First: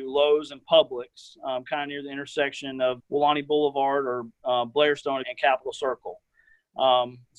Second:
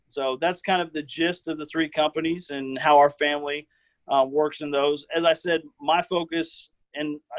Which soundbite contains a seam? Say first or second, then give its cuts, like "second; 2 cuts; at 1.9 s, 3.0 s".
first; 2 cuts; at 3.0 s, 5.2 s